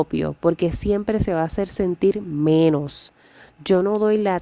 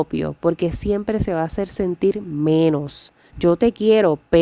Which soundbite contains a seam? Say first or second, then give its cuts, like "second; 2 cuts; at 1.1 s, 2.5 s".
second; 1 cut; at 3.3 s